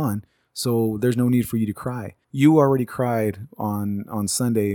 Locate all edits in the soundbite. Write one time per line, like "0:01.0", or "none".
0:02.2